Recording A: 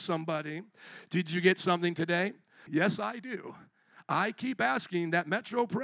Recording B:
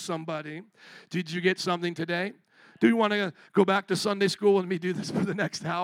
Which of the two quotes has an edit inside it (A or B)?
A